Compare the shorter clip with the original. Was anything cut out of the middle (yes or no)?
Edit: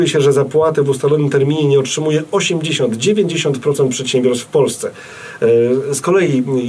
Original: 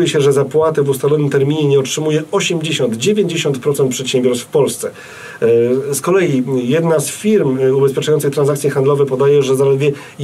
no